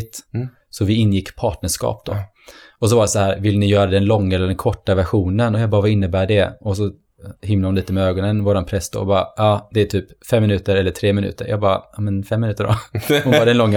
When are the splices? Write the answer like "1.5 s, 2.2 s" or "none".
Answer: none